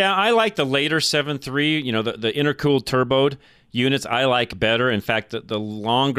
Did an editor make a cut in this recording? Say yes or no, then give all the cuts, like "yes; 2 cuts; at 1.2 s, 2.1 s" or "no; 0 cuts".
no; 0 cuts